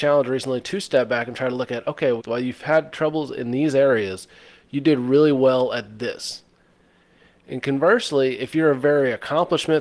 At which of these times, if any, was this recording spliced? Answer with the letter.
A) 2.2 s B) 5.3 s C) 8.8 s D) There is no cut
A